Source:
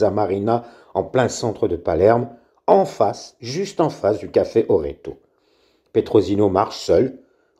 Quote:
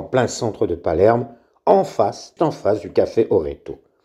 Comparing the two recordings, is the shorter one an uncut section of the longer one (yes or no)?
no